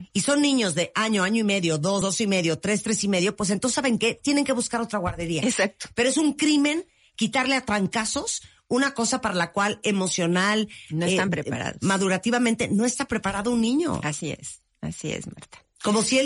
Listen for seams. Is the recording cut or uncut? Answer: uncut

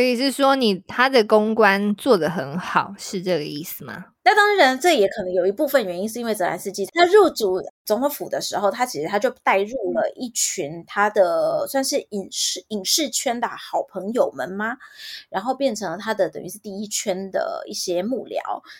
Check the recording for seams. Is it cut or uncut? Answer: cut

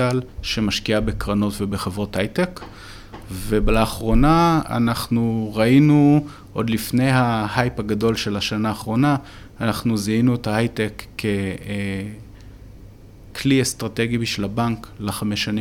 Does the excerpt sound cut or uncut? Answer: uncut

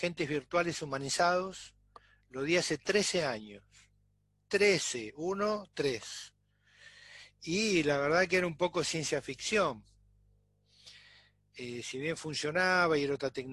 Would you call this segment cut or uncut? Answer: uncut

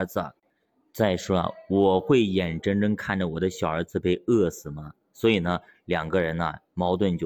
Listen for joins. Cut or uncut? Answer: uncut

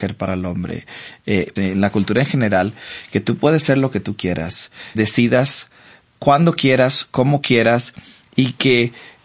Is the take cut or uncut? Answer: cut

